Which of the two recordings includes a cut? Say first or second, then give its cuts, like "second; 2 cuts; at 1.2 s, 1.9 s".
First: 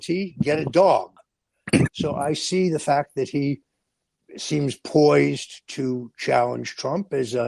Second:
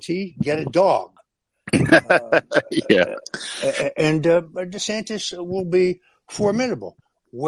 first; 1 cut; at 1.9 s